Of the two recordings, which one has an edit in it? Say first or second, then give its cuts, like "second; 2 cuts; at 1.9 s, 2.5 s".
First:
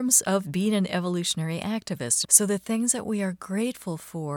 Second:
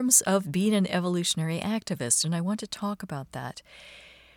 first; 1 cut; at 2.2 s